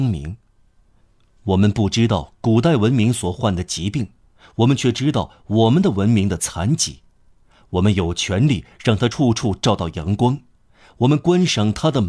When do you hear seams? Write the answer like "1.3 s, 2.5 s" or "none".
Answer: none